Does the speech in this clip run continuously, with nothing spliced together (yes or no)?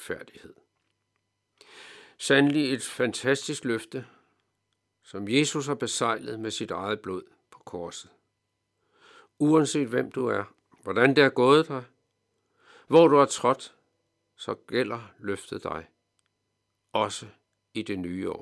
yes